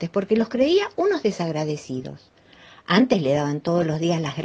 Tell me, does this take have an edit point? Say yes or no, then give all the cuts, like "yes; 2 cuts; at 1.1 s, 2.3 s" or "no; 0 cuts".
no; 0 cuts